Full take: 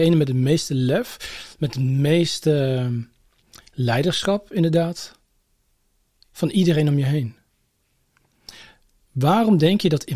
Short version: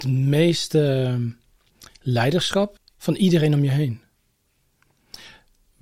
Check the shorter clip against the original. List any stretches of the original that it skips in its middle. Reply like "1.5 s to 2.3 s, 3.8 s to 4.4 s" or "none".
4.5 s to 6.1 s